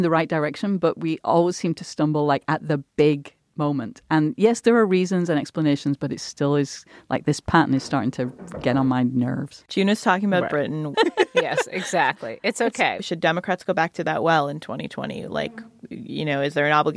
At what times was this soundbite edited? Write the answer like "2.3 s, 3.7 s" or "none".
10.9 s, 13.0 s